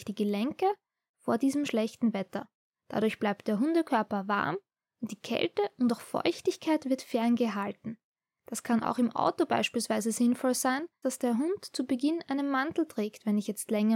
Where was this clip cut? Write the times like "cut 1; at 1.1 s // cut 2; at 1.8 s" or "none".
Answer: cut 1; at 11.0 s